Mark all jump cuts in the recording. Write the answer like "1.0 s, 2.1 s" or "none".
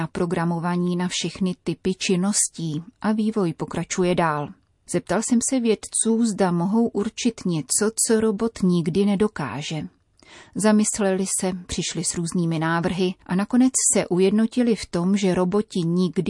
none